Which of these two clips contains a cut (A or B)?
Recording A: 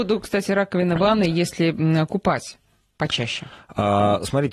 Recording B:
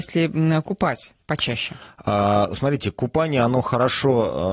B